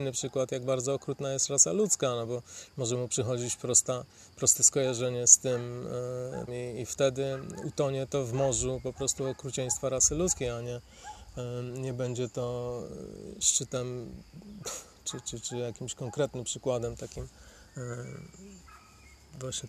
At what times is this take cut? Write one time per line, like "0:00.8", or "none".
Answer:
0:06.5